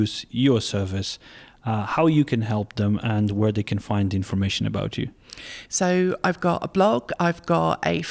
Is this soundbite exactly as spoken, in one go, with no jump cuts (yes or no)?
yes